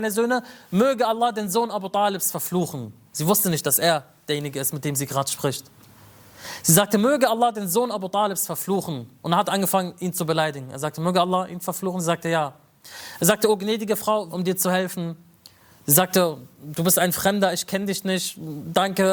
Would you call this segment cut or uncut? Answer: cut